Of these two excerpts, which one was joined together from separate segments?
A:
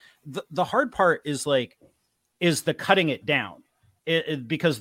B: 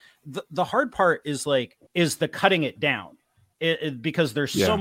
B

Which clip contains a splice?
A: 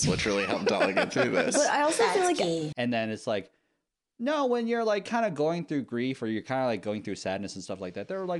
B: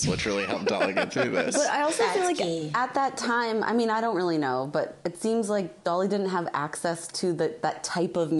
A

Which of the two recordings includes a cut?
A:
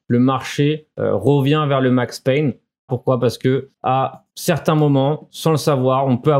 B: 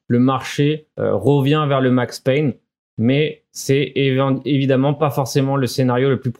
A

